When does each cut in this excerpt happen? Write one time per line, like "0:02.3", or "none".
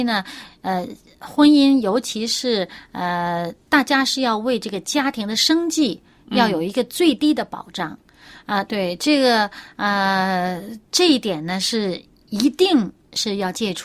0:08.7
0:10.9